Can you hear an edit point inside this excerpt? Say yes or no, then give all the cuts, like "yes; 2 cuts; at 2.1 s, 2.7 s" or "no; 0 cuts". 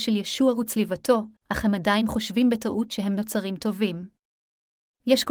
yes; 1 cut; at 1.4 s